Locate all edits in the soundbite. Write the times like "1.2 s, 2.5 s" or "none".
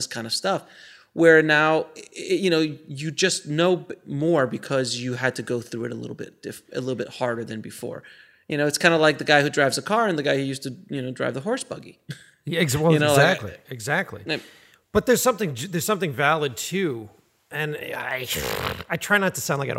none